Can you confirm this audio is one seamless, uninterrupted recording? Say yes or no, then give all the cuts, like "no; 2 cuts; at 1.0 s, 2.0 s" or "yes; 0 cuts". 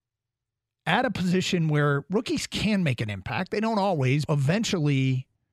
no; 1 cut; at 4.3 s